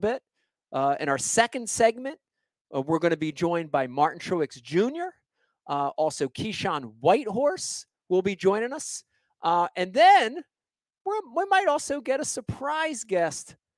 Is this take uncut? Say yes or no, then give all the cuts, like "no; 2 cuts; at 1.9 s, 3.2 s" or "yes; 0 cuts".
yes; 0 cuts